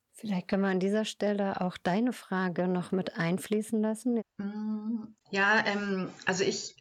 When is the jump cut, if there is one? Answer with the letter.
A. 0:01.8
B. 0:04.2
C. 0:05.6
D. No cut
B